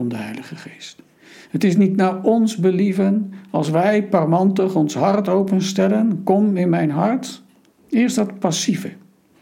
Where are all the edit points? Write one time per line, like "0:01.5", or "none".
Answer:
0:07.7

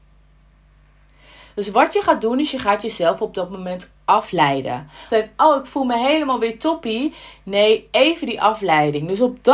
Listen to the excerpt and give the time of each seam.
0:05.1

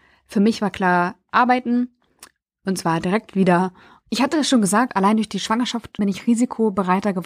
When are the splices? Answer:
0:04.0
0:06.0

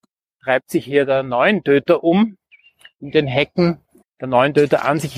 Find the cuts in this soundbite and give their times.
0:04.0

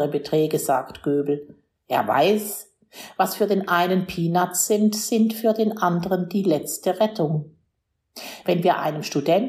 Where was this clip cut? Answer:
none

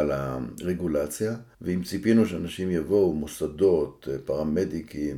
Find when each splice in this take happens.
0:01.5

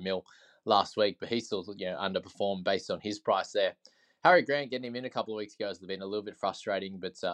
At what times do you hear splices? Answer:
none

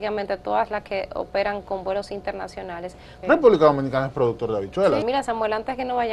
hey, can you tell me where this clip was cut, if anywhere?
0:03.2
0:05.0

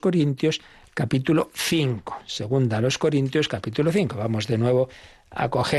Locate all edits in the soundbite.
none

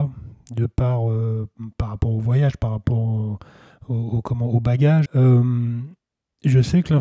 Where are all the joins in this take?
0:05.1

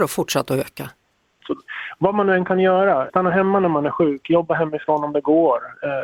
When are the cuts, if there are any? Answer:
0:01.4
0:03.1

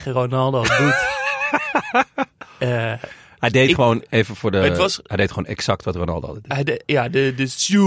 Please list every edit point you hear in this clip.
none

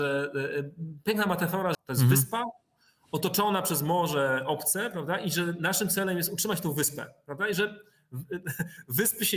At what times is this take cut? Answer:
0:01.7

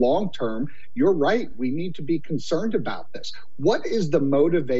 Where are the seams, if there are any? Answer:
none

